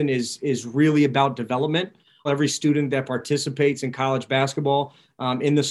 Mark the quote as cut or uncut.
cut